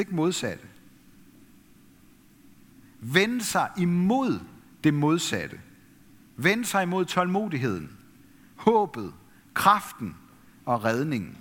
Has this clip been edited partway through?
no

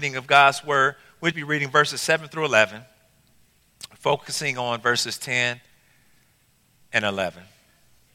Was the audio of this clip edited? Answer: yes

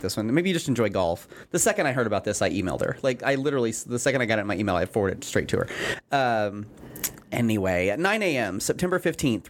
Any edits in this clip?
no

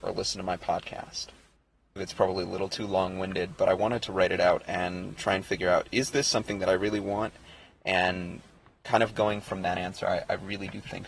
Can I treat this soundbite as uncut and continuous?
no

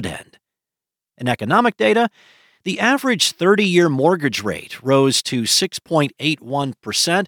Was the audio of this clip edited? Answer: no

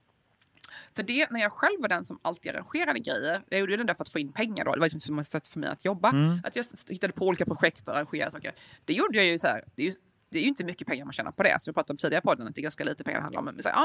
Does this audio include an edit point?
no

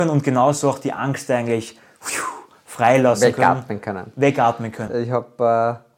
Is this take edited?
yes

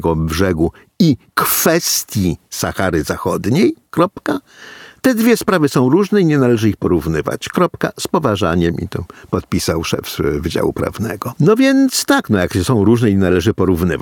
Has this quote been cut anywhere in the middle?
no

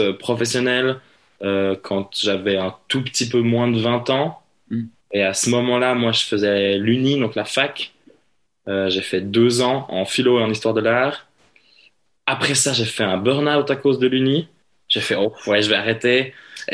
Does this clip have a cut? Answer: no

